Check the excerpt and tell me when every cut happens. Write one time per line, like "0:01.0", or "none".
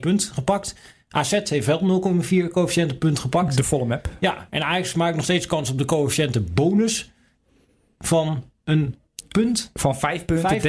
none